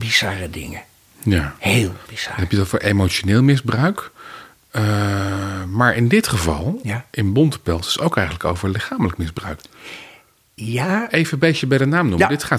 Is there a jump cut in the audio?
no; 0 cuts

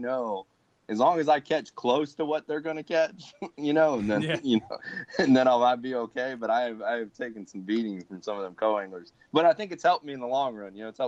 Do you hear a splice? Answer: no; 0 cuts

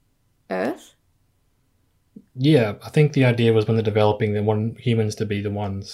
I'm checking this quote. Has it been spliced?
no; 0 cuts

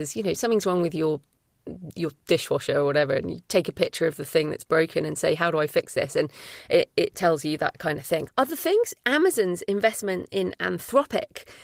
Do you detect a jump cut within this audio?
yes; 1 cut; at 8.3 s

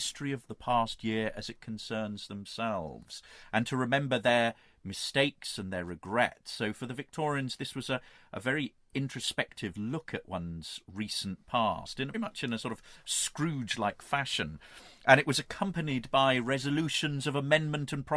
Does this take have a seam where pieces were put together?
yes; 1 cut; at 12.1 s

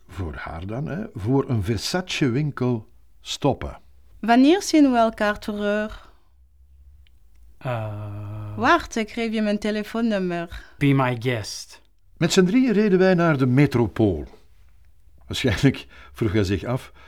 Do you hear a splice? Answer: yes; 3 cuts; at 4.1 s, 10.8 s, 15.2 s

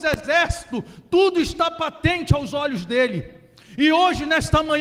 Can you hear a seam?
no; 0 cuts

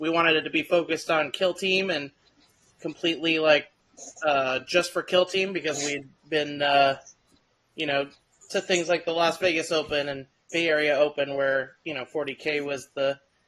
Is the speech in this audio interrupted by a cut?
no; 0 cuts

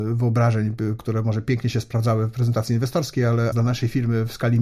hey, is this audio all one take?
no; 2 cuts; at 1.0 s, 3.5 s

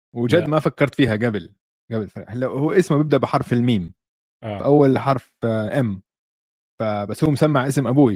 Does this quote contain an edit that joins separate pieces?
no; 0 cuts

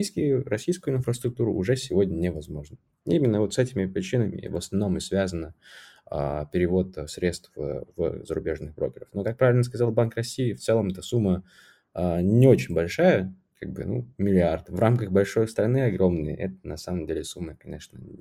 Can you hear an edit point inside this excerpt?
no; 0 cuts

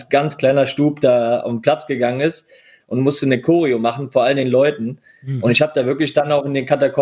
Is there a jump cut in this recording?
no; 0 cuts

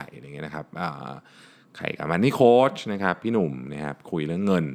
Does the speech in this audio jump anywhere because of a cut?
no; 0 cuts

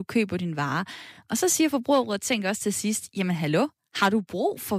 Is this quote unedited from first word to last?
yes; 0 cuts

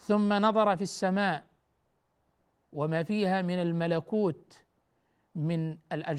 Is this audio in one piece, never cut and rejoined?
yes; 0 cuts

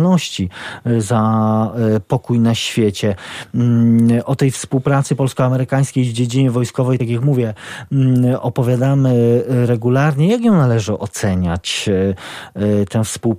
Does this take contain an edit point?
no; 0 cuts

